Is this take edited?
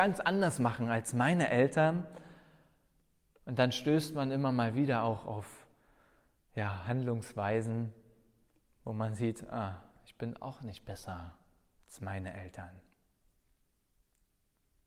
no; 0 cuts

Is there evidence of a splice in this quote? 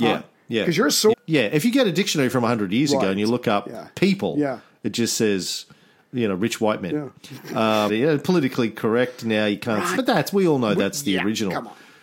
yes; 3 cuts; at 1.1 s, 7.9 s, 10.0 s

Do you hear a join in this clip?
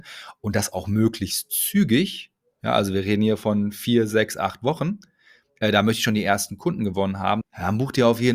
yes; 1 cut; at 7.4 s

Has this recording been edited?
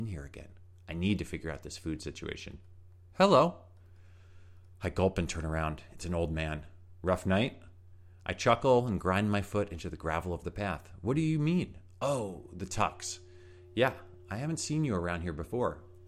no; 0 cuts

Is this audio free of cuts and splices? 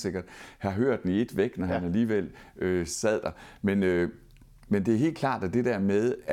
yes; 0 cuts

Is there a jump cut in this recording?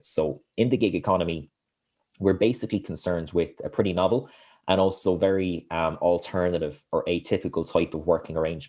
no; 0 cuts

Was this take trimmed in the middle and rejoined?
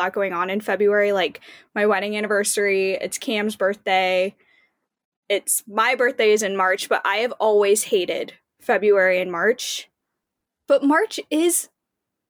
no; 0 cuts

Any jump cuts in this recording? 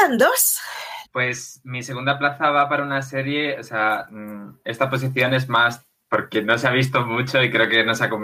yes; 1 cut; at 1.0 s

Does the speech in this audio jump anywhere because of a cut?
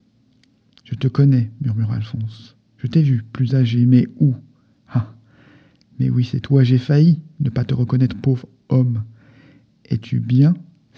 no; 0 cuts

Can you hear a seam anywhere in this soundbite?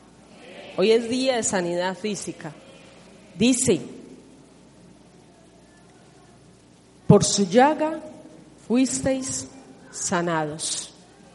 no; 0 cuts

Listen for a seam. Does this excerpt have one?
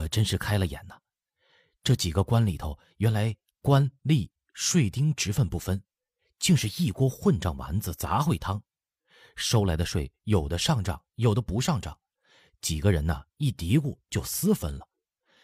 no; 0 cuts

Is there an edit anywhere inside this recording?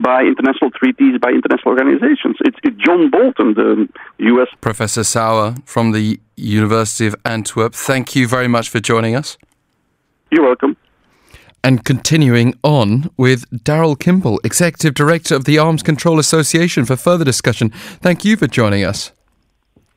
yes; 1 cut; at 4.5 s

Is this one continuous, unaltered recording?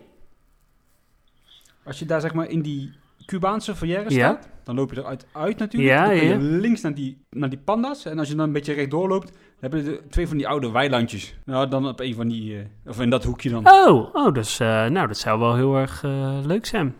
yes; 0 cuts

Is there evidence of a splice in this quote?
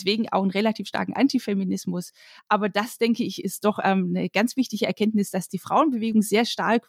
yes; 1 cut; at 2.4 s

